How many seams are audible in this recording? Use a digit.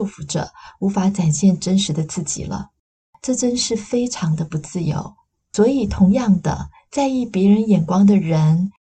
1